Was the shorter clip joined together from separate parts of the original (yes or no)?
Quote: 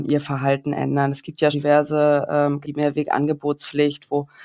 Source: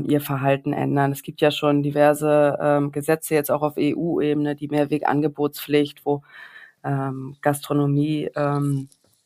yes